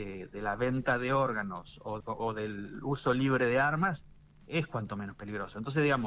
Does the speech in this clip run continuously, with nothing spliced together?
no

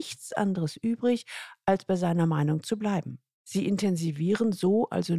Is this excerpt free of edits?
yes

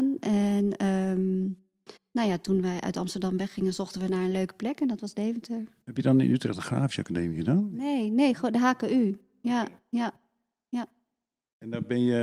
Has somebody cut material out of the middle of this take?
no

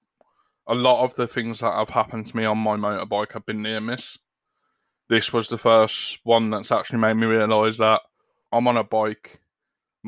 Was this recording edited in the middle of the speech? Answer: yes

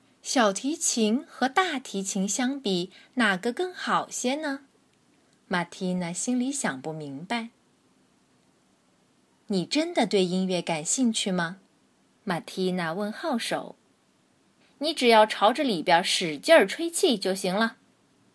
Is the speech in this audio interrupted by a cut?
yes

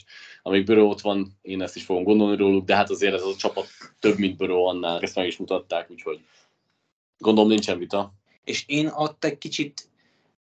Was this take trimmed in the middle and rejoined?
yes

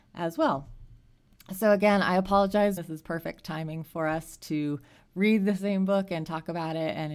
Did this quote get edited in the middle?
yes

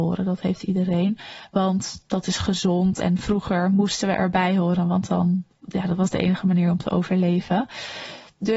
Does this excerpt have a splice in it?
no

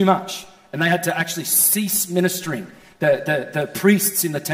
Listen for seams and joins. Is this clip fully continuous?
yes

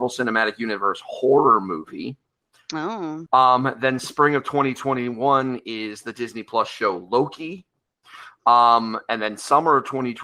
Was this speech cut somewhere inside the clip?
yes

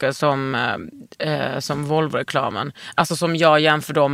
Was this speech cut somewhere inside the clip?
no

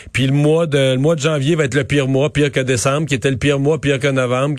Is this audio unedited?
yes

